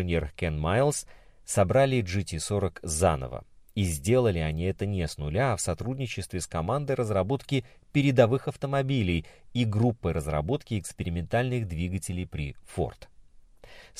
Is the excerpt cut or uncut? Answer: uncut